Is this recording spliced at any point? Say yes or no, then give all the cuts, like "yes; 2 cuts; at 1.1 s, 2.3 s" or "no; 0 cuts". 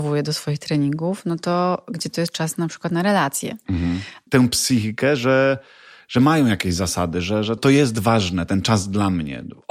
yes; 2 cuts; at 4.3 s, 7.6 s